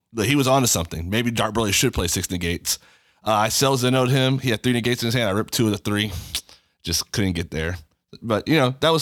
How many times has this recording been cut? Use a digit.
0